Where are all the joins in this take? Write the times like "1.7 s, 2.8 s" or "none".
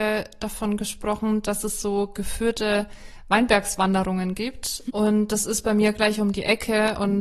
4.9 s